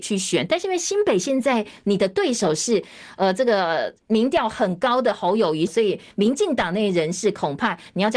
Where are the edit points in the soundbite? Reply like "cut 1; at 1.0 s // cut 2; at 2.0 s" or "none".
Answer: cut 1; at 5.7 s